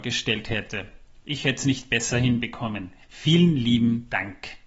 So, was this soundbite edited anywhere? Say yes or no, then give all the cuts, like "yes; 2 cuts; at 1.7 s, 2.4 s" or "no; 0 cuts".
no; 0 cuts